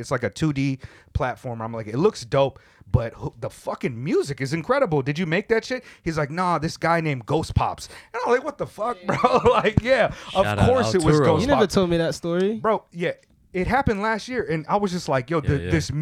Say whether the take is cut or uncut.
uncut